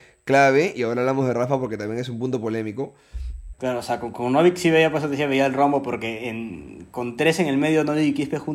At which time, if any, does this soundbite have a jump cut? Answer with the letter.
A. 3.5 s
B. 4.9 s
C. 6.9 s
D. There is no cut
A